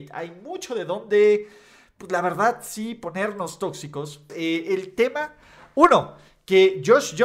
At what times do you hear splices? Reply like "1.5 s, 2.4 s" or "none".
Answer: 4.3 s